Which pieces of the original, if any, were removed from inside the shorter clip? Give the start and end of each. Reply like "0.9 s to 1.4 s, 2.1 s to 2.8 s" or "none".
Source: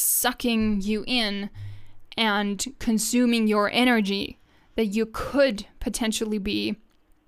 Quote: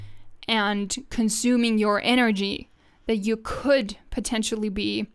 none